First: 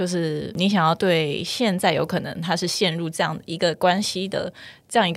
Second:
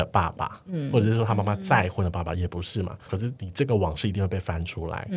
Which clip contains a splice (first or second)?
second